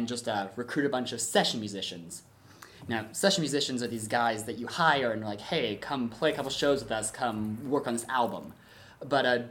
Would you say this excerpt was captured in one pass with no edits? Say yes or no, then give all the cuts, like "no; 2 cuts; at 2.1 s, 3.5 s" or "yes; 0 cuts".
yes; 0 cuts